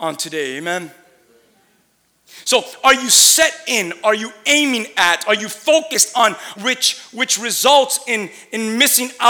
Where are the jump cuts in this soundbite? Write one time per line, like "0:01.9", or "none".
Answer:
0:06.6